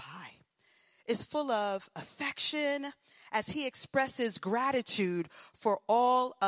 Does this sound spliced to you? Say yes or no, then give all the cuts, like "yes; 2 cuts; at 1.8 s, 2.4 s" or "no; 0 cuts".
no; 0 cuts